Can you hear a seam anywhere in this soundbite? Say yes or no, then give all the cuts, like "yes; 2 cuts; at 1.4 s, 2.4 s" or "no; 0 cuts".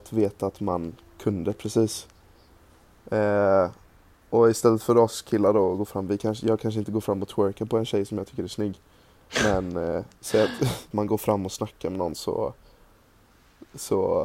yes; 1 cut; at 10.9 s